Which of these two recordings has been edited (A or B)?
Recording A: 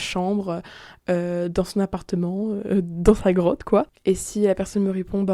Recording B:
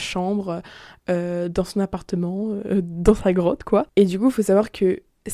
A